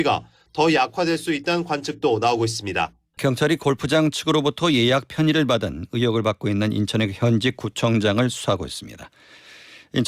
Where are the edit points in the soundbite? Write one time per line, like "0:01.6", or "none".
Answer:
0:03.2